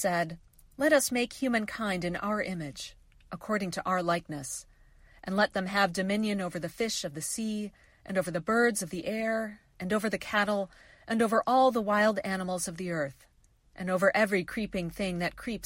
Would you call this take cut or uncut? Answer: uncut